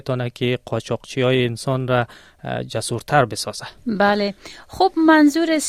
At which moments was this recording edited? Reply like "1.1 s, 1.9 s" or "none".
3.8 s